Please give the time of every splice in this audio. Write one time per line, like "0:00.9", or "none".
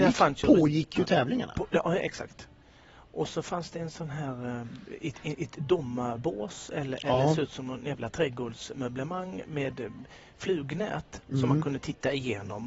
none

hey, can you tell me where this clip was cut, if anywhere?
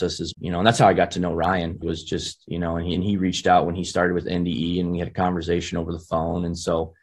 0:01.8

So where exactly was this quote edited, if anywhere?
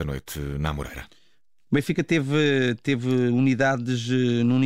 none

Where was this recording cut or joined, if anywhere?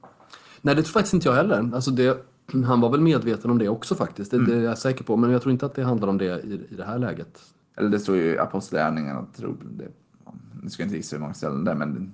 none

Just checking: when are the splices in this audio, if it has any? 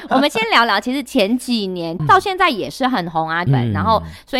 0:02.0
0:03.5

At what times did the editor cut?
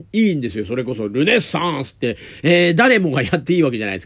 none

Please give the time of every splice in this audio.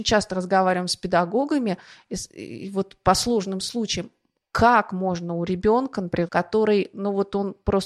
0:06.3

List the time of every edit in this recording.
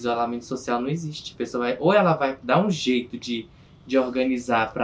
none

